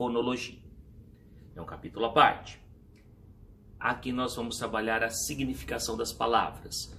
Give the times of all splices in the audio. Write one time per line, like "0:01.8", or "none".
0:01.5
0:03.8